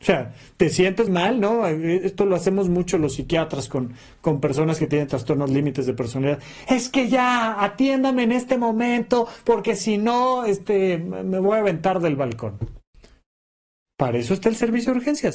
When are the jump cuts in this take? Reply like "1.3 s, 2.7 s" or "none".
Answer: 1.1 s